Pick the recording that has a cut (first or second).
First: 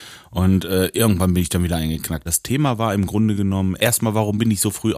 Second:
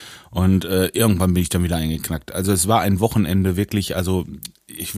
first